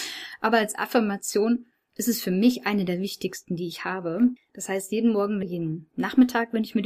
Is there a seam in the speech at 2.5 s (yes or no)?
no